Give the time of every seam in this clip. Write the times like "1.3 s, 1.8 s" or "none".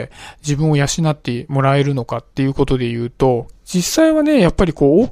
3.5 s